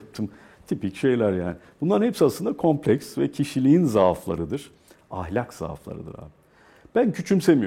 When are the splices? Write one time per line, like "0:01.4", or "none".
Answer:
none